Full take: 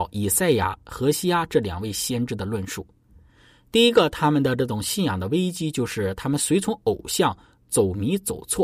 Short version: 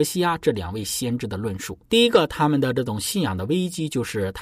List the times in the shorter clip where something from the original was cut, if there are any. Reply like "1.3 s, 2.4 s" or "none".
1.8 s